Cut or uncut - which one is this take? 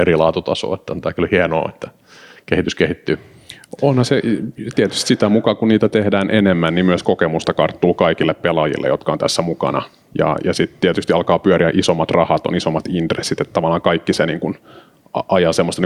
uncut